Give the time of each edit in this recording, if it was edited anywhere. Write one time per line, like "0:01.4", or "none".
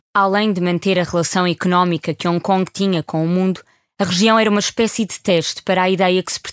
0:03.9

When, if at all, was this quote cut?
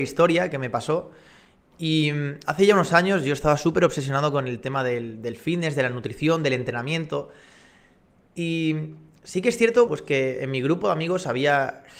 0:09.9

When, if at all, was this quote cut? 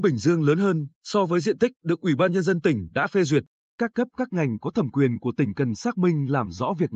none

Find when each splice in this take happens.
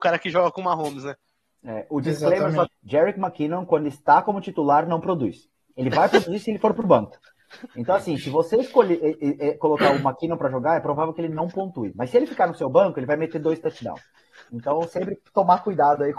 0:02.7

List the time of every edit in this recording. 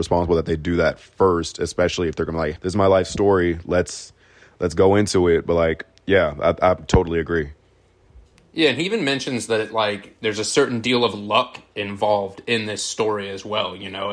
0:02.6

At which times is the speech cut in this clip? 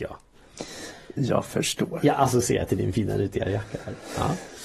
none

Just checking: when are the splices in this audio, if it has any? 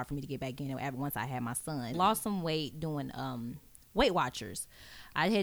0:01.9

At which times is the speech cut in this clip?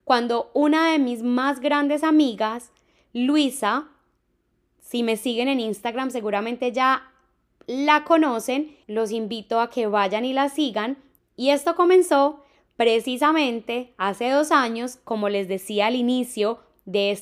0:08.8
0:11.2

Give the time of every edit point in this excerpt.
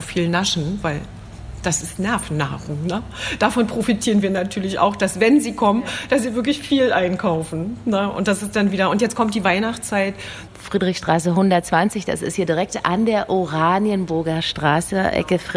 0:10.5

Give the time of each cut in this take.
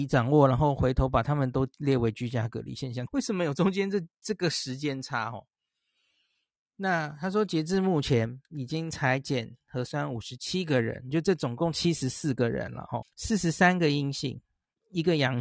0:03.1
0:13.0

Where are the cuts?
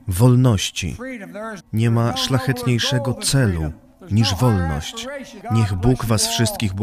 0:01.6
0:05.4

